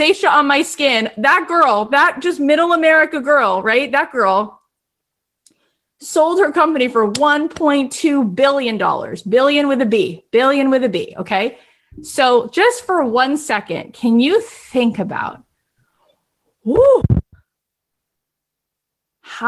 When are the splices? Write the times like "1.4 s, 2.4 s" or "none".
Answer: none

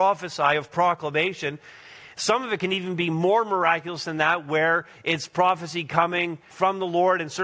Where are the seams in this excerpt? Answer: 6.5 s

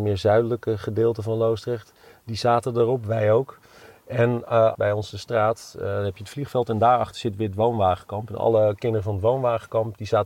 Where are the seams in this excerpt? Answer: 4.7 s

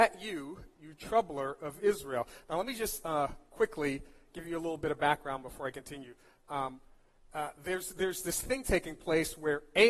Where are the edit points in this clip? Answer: none

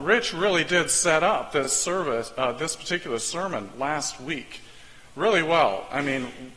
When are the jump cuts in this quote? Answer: none

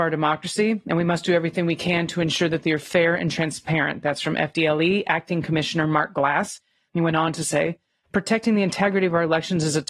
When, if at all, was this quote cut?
6.9 s

